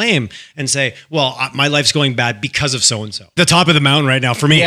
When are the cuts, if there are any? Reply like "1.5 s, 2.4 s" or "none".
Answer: 3.4 s